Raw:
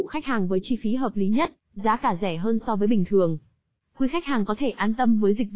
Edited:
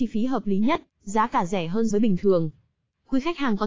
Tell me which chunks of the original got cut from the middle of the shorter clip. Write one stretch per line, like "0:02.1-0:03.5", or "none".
0:02.6-0:02.8

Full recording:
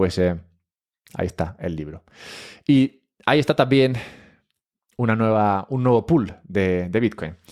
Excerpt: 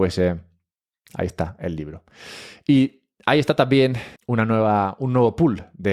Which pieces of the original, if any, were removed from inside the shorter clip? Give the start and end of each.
0:04.2-0:04.9

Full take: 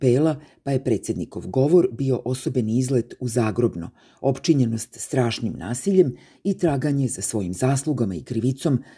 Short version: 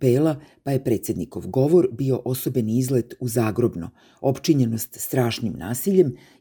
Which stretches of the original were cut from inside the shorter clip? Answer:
none

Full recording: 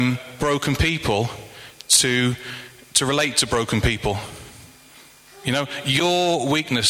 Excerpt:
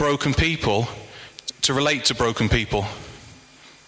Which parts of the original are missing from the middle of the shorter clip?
0:01.9-0:02.8

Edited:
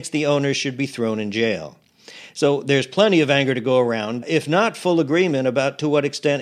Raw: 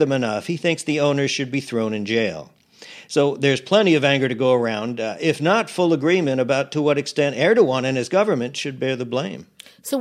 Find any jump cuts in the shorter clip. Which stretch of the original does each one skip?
0:05.0-0:05.1

